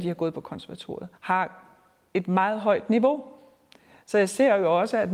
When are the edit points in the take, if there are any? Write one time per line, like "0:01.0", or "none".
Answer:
0:01.2